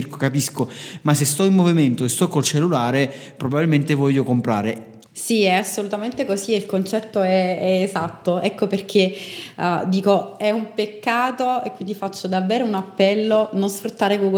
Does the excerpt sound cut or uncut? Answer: cut